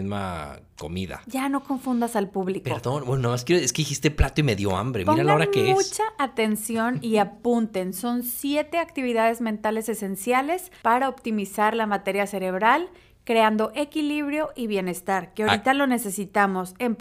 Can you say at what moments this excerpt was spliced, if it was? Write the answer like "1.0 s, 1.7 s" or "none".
none